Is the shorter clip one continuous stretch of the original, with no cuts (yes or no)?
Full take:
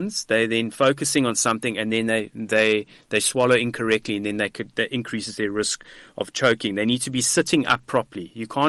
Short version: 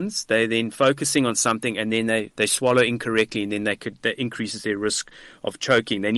no